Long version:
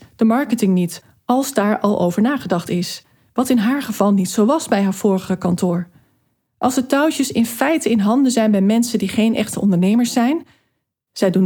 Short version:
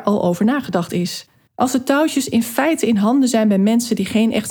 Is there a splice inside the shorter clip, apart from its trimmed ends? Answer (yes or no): yes